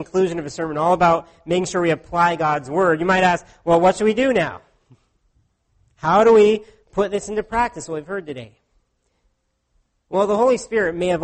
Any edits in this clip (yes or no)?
no